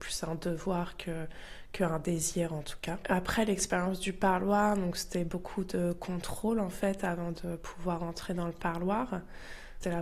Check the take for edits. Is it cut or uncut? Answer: uncut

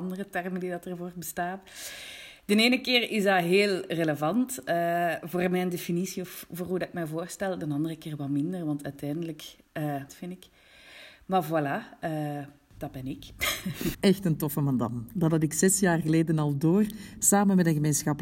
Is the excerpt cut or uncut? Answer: cut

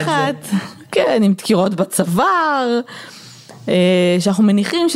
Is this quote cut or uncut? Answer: uncut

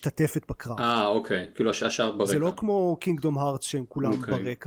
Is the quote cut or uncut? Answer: uncut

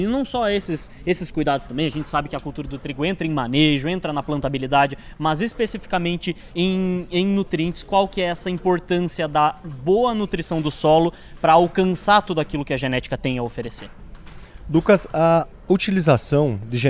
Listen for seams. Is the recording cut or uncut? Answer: uncut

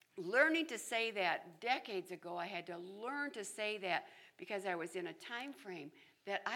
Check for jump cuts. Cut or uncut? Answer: uncut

